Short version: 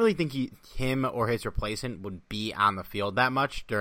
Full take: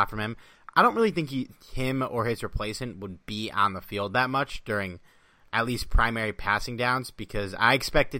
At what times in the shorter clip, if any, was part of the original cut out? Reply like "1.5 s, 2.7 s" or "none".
none